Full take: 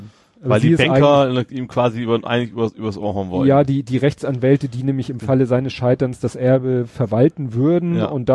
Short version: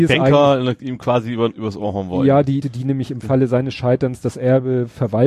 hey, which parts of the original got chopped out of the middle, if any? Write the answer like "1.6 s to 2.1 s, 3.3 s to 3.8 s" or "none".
2.2 s to 2.7 s, 3.8 s to 4.6 s